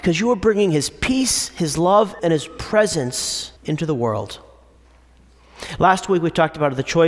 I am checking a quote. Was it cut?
yes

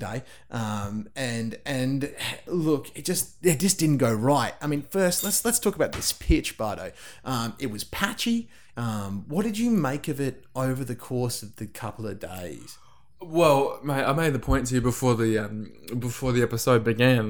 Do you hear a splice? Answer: yes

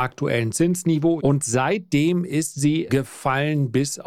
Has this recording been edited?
yes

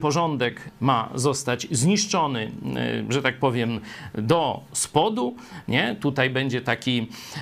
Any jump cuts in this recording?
no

